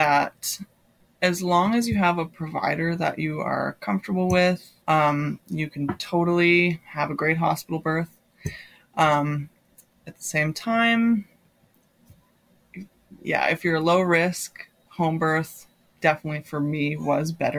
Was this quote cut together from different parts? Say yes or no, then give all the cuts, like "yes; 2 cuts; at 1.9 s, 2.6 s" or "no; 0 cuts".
yes; 1 cut; at 4.8 s